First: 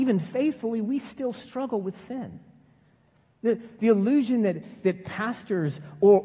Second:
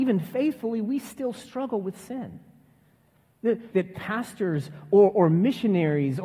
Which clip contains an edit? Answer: second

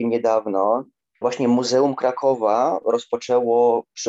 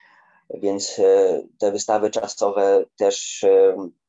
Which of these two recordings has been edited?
first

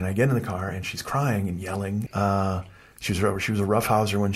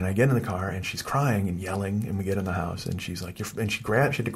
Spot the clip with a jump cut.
first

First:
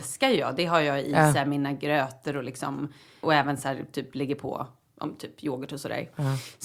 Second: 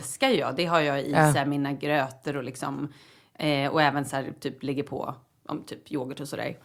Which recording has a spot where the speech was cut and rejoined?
first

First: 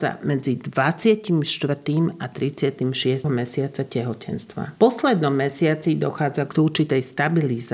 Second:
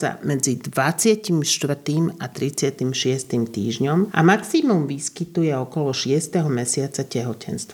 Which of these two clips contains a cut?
first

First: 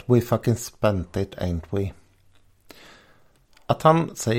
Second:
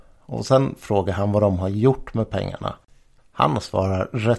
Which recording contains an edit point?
second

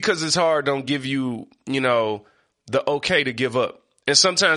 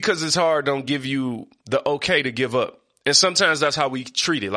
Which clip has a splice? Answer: second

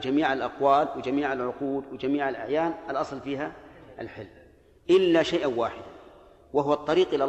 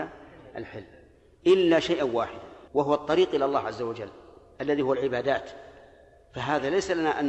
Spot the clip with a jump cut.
second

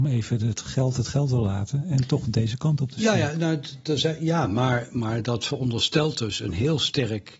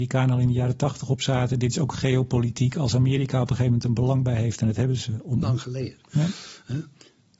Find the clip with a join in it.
second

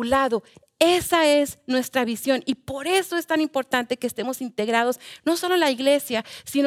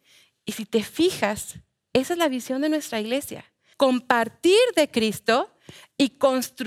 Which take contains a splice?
second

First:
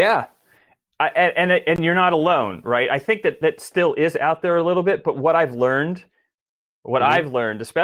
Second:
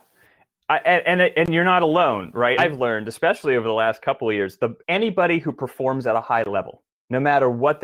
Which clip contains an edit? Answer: second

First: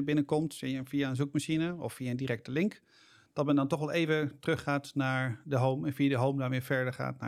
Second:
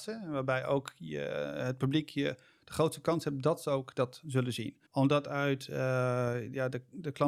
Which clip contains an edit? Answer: second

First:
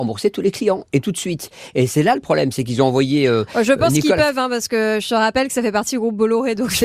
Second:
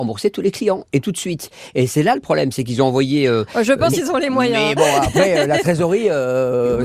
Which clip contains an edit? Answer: second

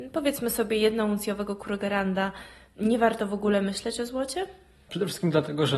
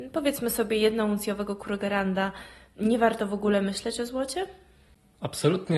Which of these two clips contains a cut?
first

